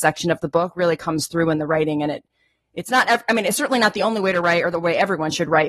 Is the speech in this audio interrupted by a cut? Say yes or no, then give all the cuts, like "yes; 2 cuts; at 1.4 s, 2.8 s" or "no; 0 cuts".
no; 0 cuts